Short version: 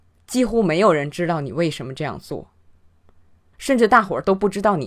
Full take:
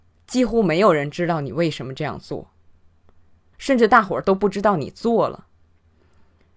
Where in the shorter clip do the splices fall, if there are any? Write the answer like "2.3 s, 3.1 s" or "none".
none

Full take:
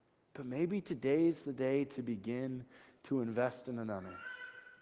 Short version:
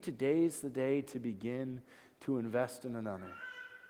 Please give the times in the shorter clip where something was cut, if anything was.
none

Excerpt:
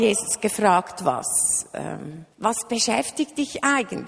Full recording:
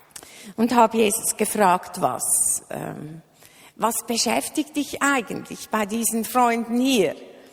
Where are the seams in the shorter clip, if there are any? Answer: 2.3 s

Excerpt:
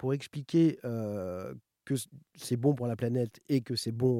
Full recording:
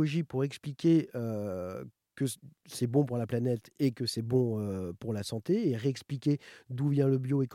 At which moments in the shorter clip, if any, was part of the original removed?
none

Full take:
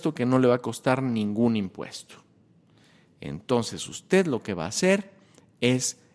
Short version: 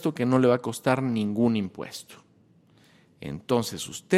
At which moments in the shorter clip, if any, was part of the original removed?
none

